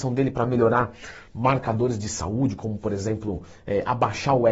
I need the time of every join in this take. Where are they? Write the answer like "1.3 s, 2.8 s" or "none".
none